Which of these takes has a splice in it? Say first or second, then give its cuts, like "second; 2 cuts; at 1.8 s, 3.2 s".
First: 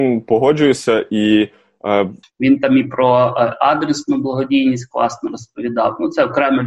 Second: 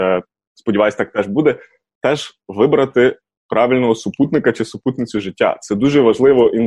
first; 1 cut; at 2.2 s